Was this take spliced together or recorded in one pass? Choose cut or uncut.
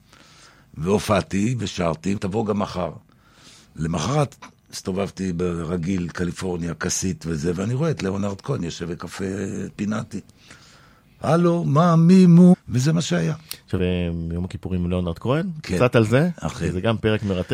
cut